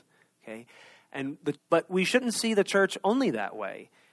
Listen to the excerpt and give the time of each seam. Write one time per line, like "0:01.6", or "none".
0:01.6